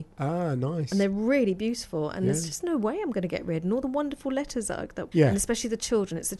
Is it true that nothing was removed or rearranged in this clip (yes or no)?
no